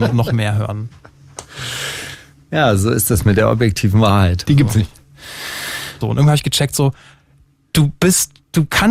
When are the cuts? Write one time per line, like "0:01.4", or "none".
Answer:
0:04.5
0:06.0